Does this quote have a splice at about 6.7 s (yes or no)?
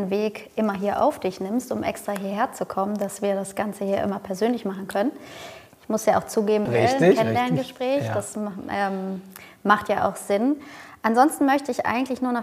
yes